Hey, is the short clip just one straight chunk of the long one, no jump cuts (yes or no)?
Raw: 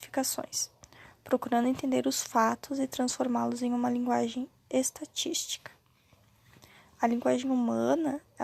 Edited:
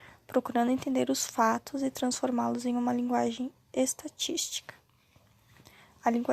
yes